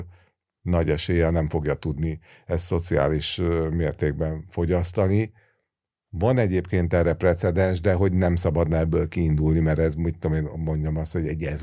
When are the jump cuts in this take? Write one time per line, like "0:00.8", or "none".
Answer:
none